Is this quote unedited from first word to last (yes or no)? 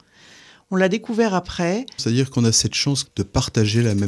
no